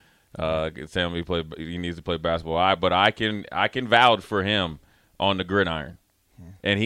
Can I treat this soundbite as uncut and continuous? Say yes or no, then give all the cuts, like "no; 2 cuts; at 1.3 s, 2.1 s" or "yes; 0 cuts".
yes; 0 cuts